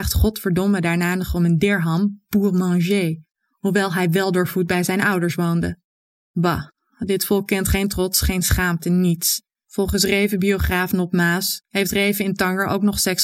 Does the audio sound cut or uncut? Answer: cut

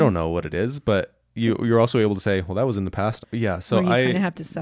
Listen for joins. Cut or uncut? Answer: cut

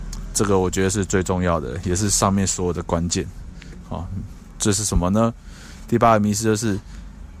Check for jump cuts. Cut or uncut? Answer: uncut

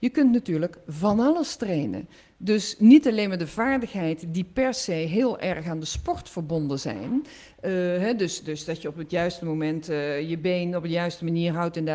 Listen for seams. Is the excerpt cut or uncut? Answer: uncut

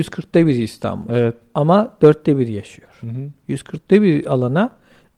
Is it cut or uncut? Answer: uncut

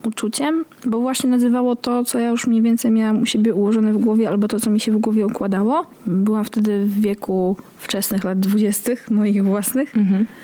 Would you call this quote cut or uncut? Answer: uncut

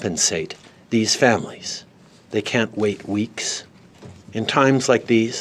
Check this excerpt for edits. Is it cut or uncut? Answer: cut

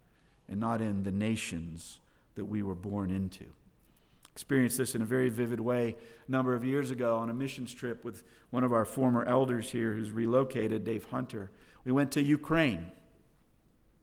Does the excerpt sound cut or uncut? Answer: uncut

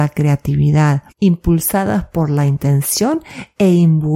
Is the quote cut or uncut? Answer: cut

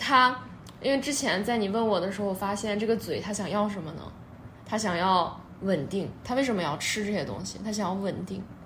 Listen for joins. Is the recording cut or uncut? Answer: uncut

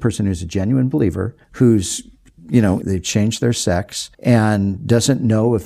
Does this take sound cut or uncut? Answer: cut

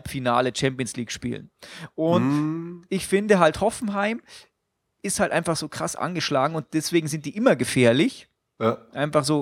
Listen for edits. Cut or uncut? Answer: uncut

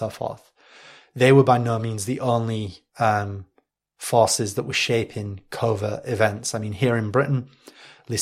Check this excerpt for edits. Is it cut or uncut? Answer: uncut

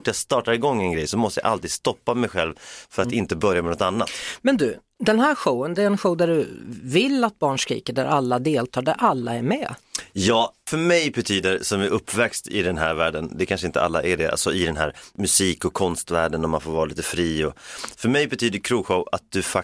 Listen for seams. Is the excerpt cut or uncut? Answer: uncut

